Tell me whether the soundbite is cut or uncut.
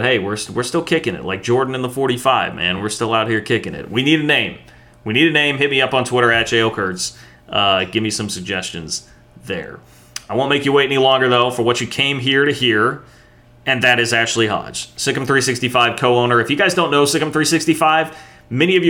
uncut